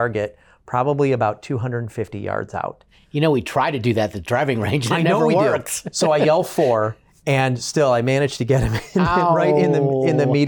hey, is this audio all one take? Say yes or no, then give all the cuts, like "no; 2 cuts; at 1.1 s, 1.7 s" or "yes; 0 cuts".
yes; 0 cuts